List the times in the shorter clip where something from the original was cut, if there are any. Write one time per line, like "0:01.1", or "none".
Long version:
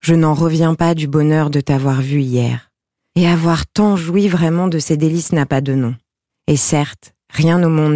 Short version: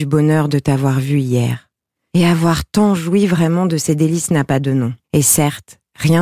0:05.0